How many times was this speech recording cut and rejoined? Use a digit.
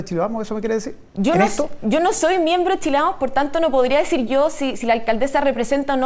1